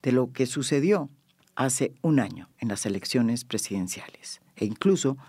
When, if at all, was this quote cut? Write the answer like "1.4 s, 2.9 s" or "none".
none